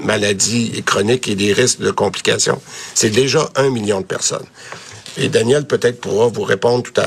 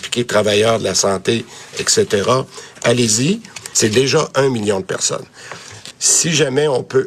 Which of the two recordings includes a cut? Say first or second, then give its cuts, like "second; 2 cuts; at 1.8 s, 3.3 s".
second; 2 cuts; at 3.7 s, 5.9 s